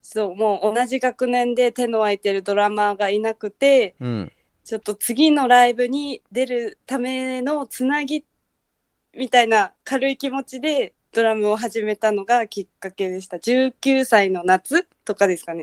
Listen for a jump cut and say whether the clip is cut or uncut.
uncut